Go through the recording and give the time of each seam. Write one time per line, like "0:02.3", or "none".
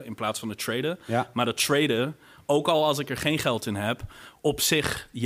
none